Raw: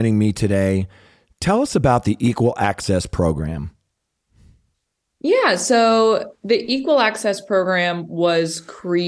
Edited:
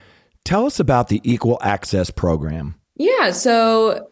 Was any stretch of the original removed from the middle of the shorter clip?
yes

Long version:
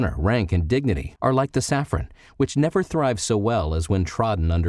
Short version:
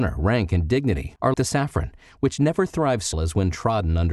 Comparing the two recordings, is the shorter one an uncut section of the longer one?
no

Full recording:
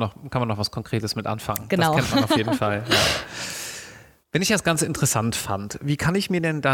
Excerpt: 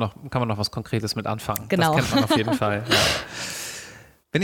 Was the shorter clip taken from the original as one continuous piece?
yes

